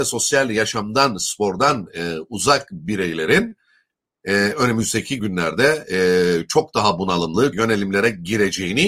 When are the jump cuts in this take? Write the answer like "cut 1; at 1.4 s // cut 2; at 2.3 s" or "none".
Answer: cut 1; at 7.5 s